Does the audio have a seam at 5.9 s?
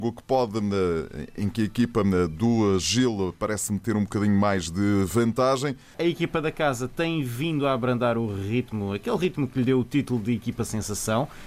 yes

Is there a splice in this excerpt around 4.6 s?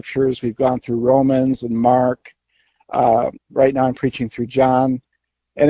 no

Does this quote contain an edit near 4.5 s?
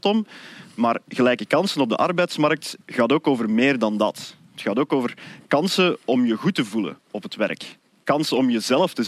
no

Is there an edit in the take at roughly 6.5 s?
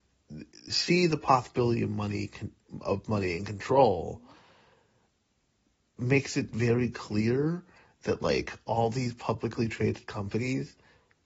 no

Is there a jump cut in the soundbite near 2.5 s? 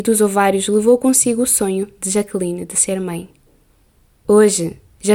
no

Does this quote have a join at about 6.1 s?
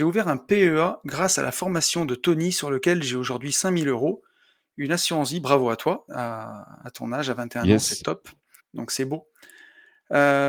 yes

